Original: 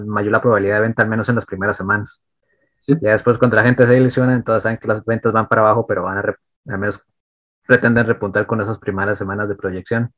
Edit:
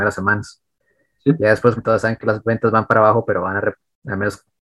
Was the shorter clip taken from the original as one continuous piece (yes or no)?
no